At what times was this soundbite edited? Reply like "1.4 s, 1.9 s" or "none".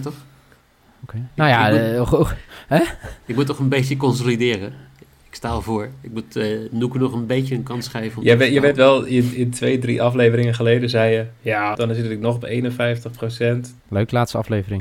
11.7 s, 13.8 s